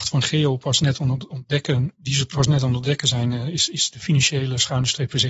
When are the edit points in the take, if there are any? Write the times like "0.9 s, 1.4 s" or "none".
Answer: 1.9 s